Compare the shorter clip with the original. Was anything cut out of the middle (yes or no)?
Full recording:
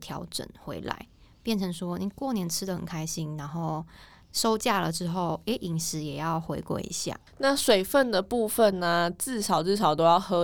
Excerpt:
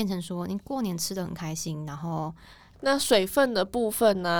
yes